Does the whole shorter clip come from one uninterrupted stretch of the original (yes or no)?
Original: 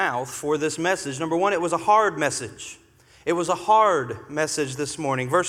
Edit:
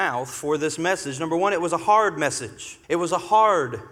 no